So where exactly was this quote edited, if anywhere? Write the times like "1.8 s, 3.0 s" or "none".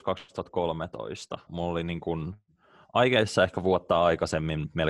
1.5 s